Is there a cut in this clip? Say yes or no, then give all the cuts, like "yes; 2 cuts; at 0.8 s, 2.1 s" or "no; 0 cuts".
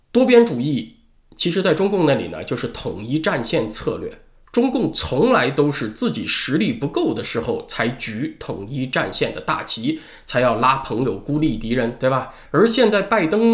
yes; 1 cut; at 12.4 s